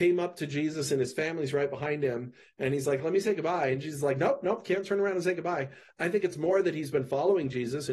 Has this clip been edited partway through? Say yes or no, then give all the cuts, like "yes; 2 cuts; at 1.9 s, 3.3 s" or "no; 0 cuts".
no; 0 cuts